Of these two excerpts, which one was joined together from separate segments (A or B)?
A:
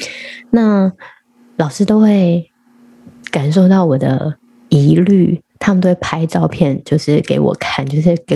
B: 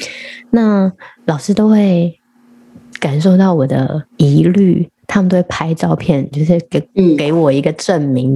B